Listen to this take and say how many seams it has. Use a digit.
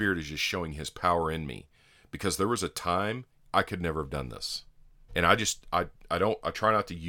2